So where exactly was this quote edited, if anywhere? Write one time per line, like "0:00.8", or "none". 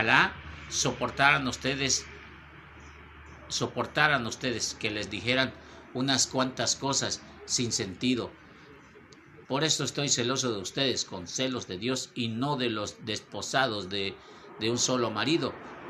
0:09.4